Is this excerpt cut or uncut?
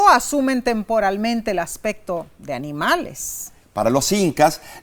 cut